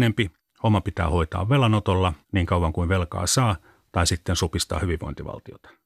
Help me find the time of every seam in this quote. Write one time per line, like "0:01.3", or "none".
0:02.2